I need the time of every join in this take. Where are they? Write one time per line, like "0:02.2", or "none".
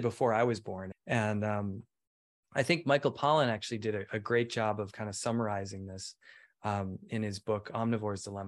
0:00.9

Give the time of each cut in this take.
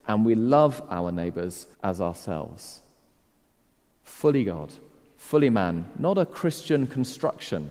0:01.7

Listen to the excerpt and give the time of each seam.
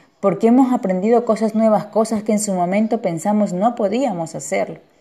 none

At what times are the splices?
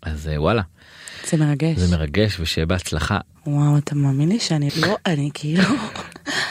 0:03.4
0:04.7

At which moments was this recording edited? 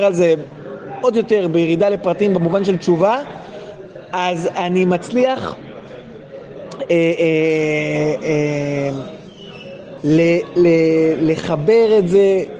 none

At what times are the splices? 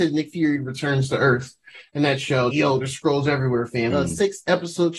0:02.5
0:03.9

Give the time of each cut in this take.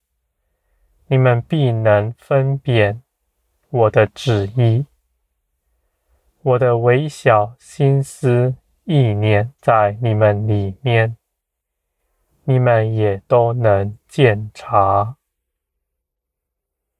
0:09.6

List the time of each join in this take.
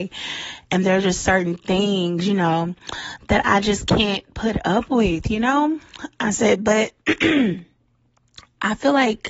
none

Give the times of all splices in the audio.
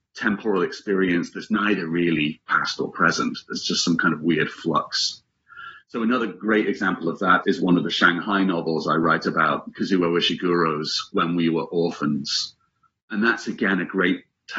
0:07.4

